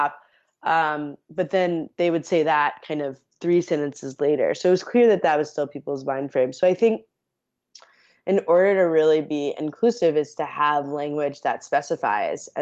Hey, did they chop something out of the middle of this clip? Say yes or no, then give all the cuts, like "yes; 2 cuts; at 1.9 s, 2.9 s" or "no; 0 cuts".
no; 0 cuts